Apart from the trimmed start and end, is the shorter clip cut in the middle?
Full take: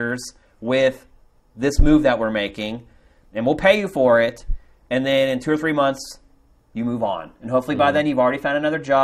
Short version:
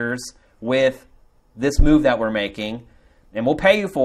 no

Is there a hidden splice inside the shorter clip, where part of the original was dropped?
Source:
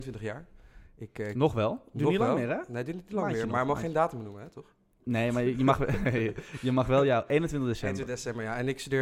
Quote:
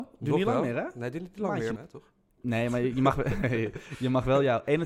yes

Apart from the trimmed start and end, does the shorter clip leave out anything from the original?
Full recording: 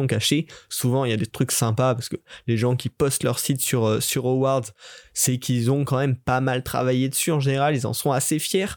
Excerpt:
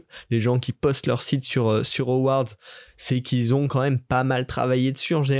no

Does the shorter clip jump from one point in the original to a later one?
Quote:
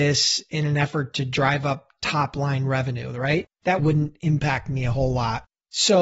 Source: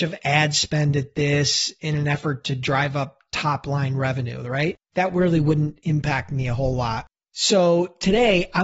yes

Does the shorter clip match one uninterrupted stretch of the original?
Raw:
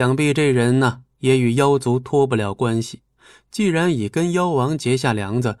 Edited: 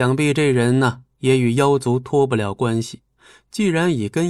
yes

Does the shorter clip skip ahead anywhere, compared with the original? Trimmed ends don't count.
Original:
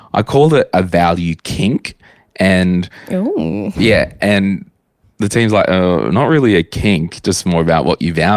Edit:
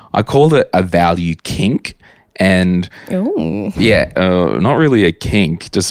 yes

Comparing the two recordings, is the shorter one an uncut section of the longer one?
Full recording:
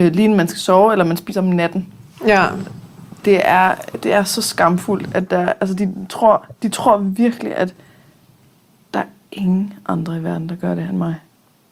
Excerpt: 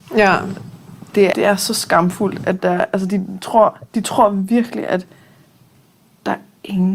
no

